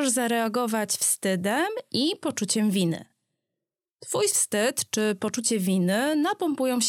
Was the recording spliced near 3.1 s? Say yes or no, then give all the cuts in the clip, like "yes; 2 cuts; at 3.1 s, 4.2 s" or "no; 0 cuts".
no; 0 cuts